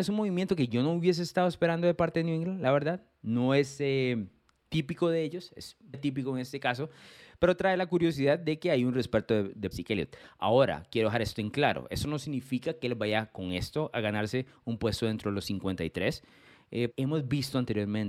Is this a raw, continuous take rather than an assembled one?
no; 3 cuts; at 5.9 s, 9.7 s, 16.9 s

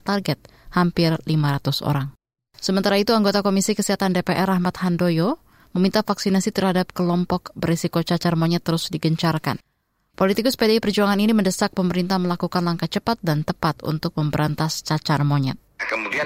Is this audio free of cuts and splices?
yes; 0 cuts

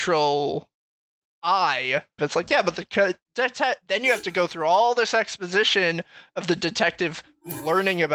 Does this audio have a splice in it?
yes; 1 cut; at 2.2 s

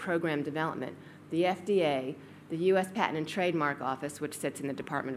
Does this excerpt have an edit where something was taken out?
no; 0 cuts

